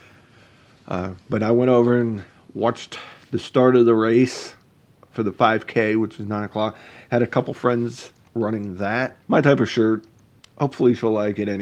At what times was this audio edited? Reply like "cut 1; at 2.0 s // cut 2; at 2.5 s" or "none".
cut 1; at 9.2 s